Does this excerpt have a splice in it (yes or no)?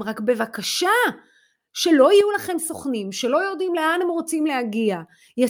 no